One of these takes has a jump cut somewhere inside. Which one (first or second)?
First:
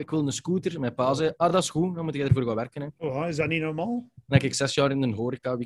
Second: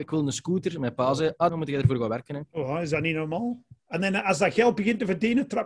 second